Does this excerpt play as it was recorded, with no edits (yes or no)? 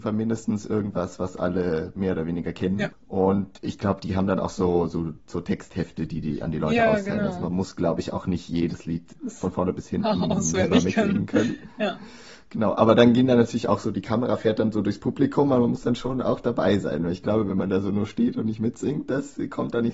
yes